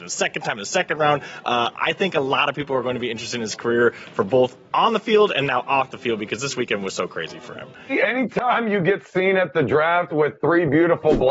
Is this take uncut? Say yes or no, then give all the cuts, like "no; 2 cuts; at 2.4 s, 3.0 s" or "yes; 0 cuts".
yes; 0 cuts